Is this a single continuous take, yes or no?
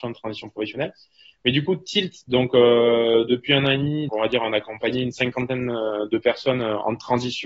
no